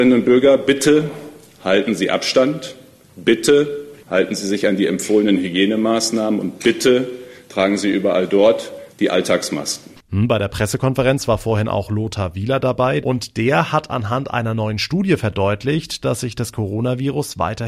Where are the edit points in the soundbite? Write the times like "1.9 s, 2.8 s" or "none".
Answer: 8.9 s, 10.0 s, 13.0 s